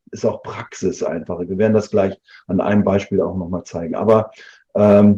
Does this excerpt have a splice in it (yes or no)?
no